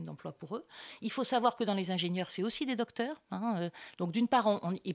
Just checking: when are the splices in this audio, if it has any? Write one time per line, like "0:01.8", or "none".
0:03.9